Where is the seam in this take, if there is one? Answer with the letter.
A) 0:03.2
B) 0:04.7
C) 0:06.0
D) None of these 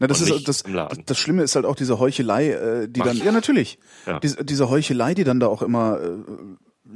A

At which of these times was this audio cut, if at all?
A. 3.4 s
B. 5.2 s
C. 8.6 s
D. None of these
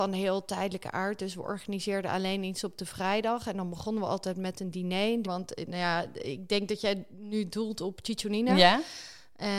B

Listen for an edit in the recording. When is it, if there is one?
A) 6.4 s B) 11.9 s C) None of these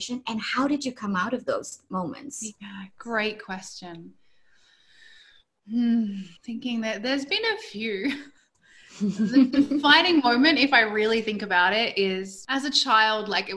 A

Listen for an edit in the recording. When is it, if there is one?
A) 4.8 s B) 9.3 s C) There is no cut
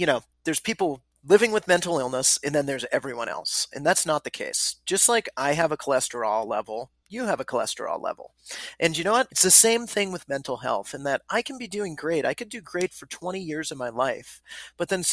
B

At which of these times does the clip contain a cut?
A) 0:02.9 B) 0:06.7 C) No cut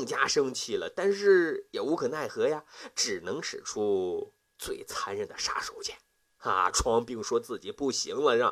C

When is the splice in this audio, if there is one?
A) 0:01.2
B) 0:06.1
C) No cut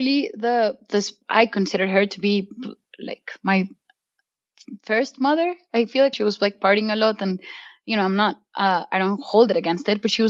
B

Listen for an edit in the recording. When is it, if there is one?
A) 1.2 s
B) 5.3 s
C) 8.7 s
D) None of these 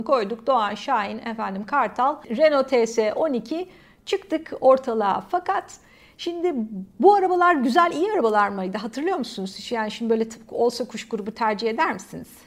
D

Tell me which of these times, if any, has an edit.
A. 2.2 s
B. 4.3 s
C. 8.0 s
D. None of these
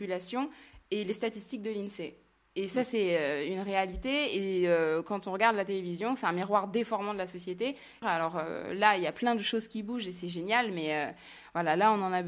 C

